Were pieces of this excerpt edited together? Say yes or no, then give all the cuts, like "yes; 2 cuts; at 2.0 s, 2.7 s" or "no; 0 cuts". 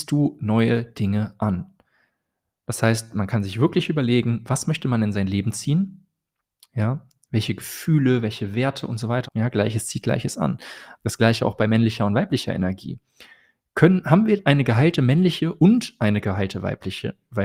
yes; 2 cuts; at 9.3 s, 10.9 s